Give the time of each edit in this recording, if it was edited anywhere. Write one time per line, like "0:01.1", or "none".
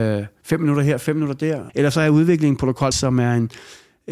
0:01.7
0:02.9